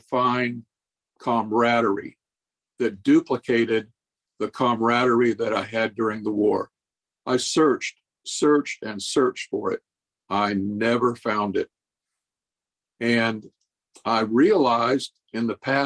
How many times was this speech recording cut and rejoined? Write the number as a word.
zero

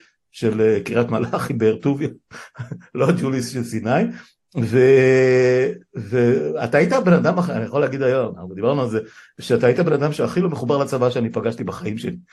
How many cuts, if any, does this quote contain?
zero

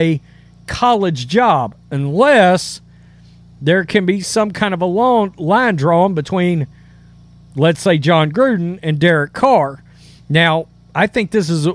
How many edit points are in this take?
zero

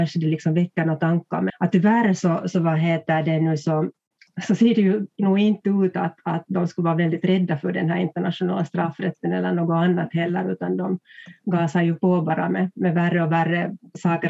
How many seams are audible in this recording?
one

